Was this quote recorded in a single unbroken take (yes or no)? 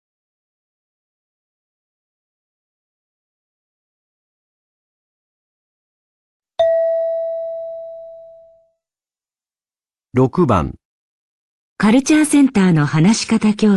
yes